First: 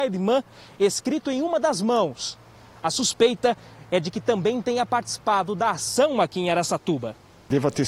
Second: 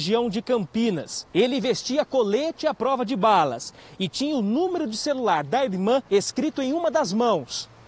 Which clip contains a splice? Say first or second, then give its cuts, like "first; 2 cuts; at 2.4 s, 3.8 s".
second; 2 cuts; at 1.3 s, 6.1 s